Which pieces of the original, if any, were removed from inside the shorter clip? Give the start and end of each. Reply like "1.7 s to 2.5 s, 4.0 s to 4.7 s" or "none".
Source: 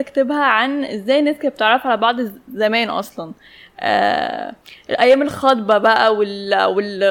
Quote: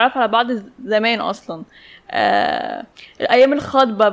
none